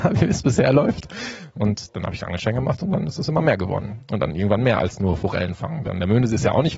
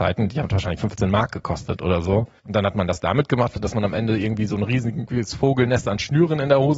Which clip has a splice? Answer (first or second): second